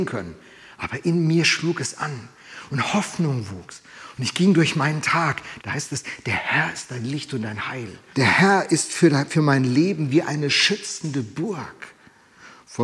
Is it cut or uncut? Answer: cut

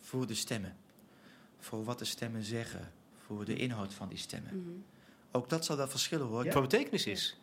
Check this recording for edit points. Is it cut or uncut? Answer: cut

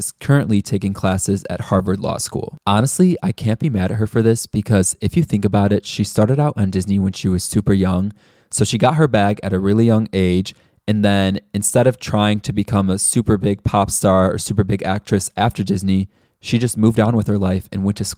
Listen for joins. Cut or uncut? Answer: uncut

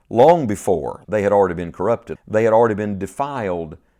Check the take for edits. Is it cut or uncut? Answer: cut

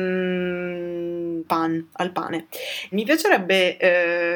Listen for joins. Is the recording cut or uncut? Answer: cut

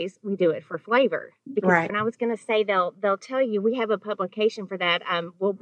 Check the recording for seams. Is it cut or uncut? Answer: cut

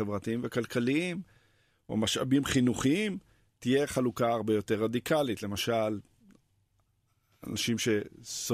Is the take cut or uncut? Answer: uncut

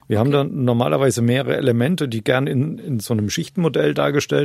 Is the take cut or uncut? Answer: cut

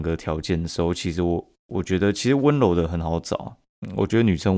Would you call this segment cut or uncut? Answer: uncut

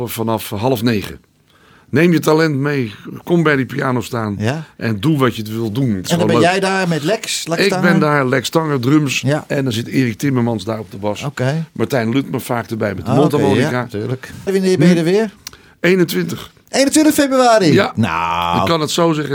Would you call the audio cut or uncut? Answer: cut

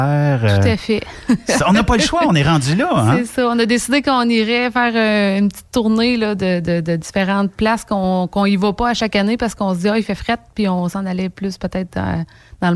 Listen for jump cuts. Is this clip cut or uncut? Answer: uncut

